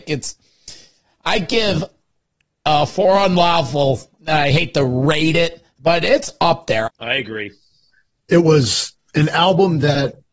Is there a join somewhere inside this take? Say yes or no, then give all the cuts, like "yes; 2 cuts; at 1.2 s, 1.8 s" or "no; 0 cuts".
yes; 1 cut; at 6.9 s